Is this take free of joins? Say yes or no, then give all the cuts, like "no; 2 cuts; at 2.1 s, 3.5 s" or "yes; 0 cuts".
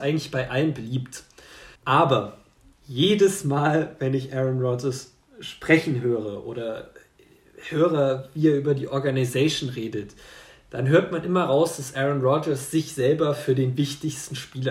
no; 1 cut; at 1.8 s